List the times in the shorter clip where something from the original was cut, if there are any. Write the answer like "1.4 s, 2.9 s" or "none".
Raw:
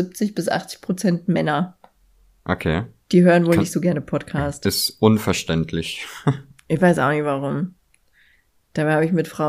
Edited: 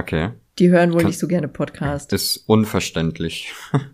none